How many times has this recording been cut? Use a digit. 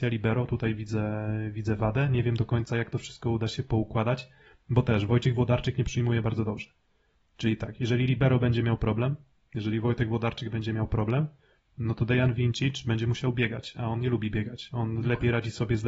0